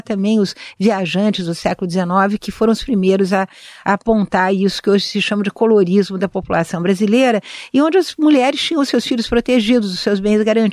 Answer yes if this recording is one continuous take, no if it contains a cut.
yes